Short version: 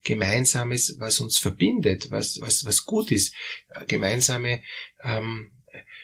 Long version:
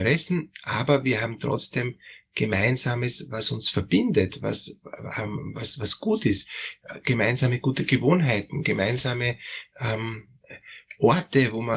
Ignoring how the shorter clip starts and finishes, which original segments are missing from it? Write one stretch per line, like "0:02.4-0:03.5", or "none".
0:04.7-0:05.5
0:07.0-0:08.6